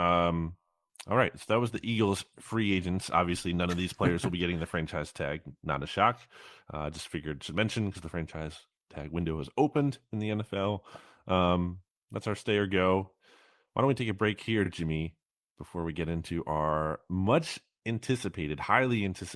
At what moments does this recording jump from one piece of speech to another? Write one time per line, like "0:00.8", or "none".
none

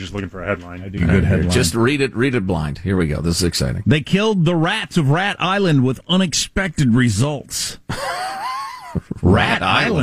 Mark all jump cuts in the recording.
0:01.0

